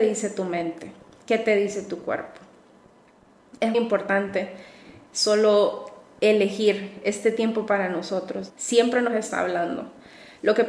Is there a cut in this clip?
yes; 2 cuts; at 3.7 s, 8.5 s

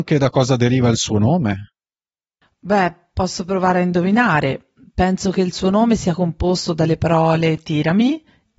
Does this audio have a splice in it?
no; 0 cuts

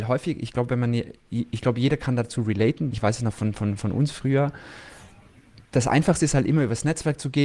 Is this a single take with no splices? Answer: no; 1 cut; at 2.9 s

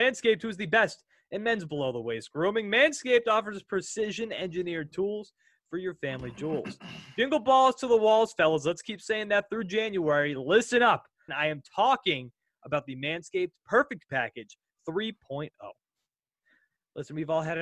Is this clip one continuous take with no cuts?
no; 1 cut; at 11.3 s

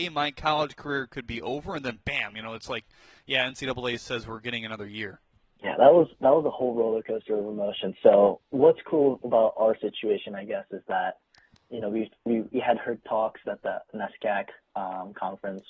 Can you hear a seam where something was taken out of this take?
no; 0 cuts

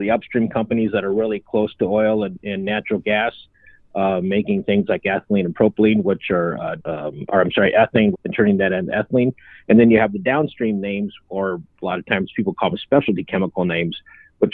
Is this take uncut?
no; 2 cuts; at 6.8 s, 8.1 s

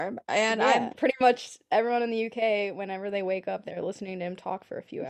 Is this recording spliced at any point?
yes; 1 cut; at 0.9 s

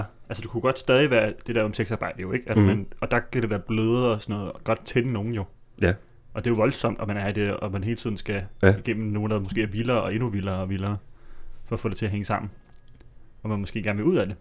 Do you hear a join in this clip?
no; 0 cuts

